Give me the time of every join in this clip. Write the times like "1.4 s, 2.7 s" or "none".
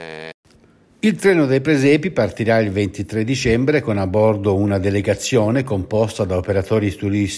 none